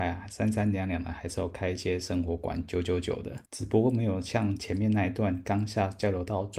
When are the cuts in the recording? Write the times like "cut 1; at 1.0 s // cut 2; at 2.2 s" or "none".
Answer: cut 1; at 3.5 s